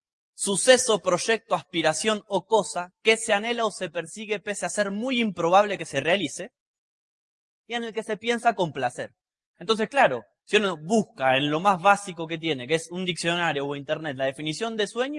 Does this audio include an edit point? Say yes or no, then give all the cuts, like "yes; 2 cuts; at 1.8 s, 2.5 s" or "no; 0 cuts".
no; 0 cuts